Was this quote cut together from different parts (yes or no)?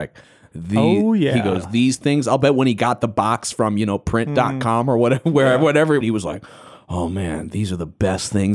yes